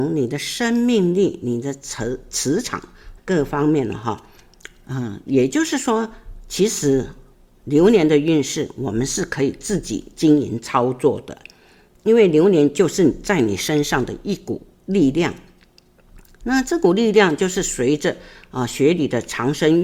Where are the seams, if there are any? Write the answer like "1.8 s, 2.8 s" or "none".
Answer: 3.2 s